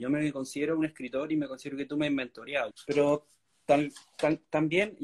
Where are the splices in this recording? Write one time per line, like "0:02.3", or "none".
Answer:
0:02.7